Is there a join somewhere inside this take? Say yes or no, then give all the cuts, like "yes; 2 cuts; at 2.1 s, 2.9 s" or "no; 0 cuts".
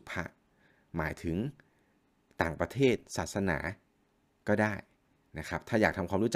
no; 0 cuts